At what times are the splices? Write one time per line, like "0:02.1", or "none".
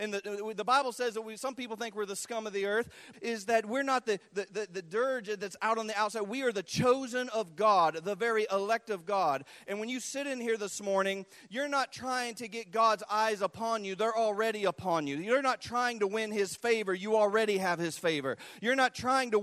0:03.1